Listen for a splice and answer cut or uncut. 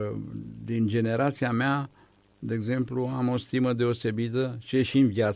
uncut